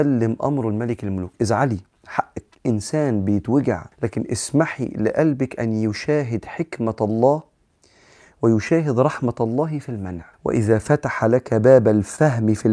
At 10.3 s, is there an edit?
yes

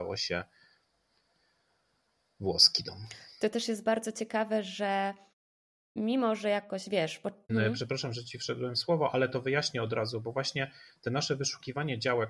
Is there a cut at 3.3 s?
no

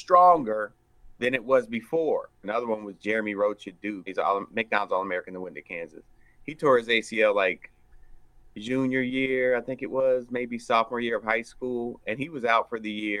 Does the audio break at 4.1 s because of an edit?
yes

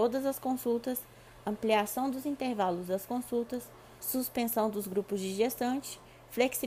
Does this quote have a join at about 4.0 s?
yes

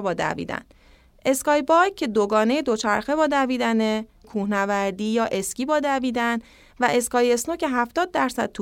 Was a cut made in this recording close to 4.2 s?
yes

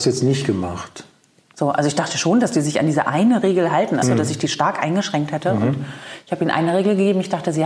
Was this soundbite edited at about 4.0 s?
yes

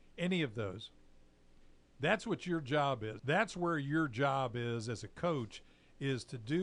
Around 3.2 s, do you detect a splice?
yes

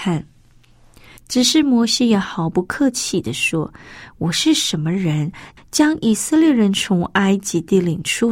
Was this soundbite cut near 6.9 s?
no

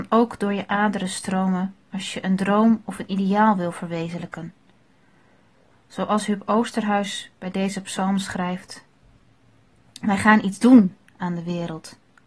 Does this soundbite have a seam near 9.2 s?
no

